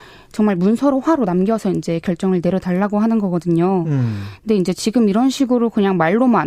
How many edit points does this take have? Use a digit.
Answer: 0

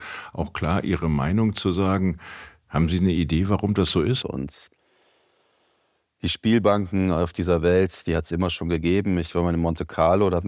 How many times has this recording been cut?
1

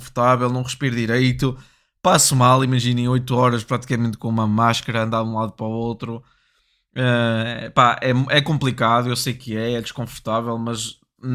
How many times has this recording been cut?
0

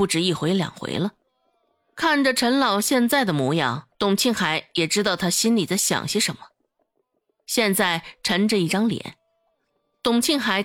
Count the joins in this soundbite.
1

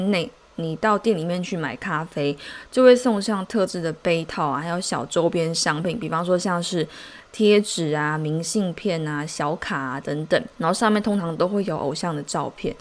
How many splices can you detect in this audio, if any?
1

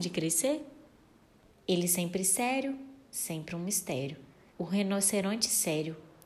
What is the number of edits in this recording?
2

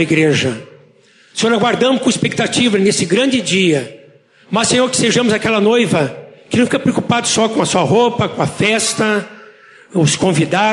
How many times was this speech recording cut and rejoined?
0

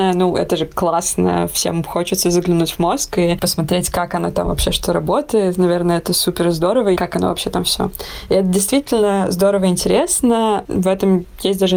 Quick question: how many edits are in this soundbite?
1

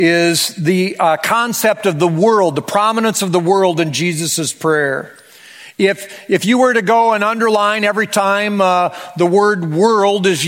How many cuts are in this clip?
0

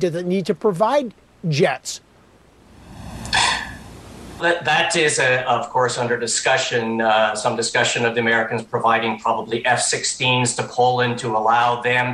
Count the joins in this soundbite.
1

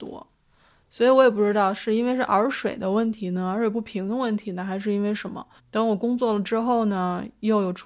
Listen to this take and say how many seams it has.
1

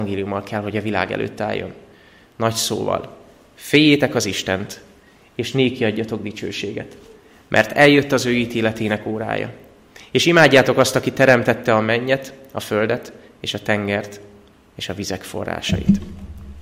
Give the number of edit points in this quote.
0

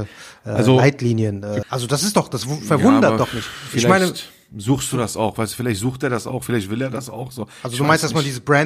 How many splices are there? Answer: 1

